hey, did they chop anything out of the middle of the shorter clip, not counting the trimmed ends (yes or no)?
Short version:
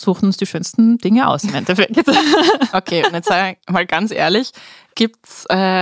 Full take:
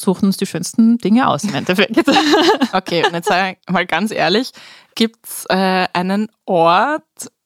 no